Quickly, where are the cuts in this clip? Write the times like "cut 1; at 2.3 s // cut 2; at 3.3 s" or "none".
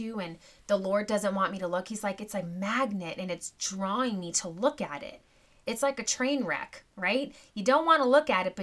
cut 1; at 5.6 s